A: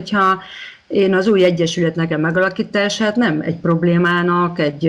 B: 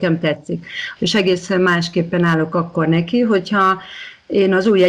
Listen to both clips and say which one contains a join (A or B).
B